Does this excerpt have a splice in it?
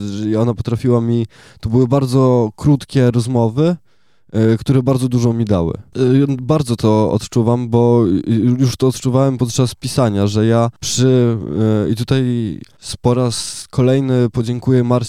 yes; 1 cut; at 5.9 s

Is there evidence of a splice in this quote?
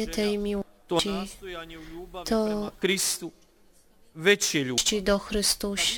no; 0 cuts

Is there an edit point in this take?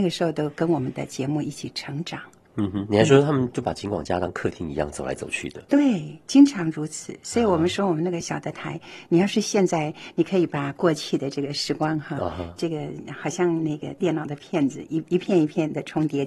yes; 1 cut; at 8.2 s

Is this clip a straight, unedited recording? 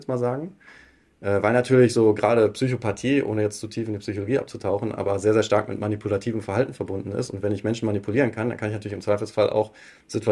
yes; 0 cuts

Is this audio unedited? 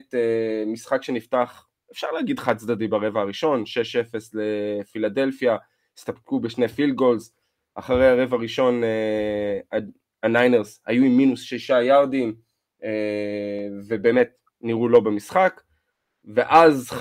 yes; 0 cuts

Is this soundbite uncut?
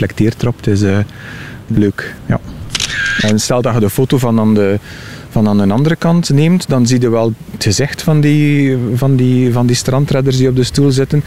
yes; 0 cuts

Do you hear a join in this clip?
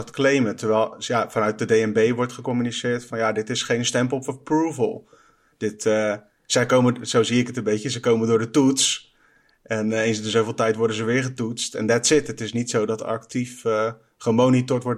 no; 0 cuts

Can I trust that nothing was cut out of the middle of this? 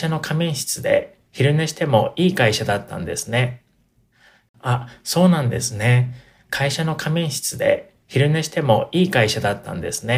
yes; 0 cuts

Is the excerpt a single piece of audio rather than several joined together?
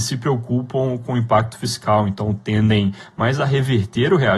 yes; 0 cuts

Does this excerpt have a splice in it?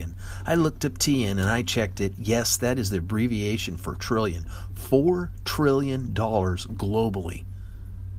no; 0 cuts

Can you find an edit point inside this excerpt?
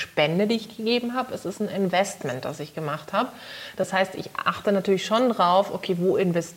no; 0 cuts

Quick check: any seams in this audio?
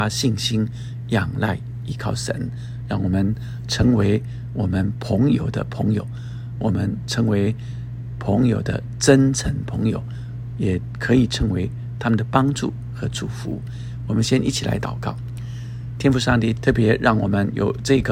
yes; 1 cut; at 16.6 s

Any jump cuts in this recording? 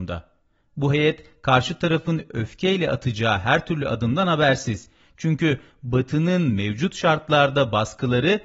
no; 0 cuts

